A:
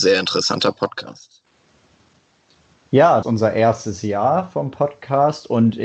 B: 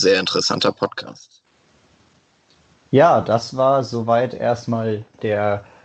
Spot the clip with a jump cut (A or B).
A